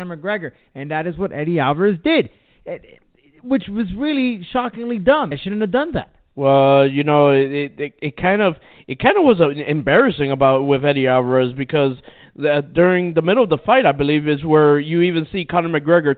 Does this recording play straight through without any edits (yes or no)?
no